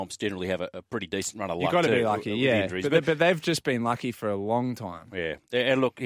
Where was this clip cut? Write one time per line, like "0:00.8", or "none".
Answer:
none